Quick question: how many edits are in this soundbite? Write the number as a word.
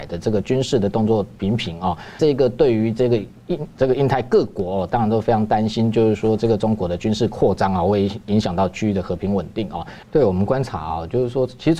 two